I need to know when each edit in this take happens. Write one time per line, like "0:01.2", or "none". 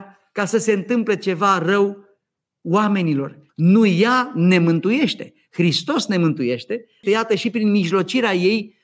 0:03.5
0:07.0